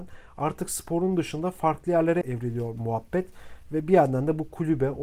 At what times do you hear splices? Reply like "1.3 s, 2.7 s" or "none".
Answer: 2.2 s